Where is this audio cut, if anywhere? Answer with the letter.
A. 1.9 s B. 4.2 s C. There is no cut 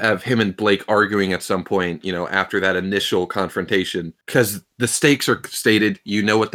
B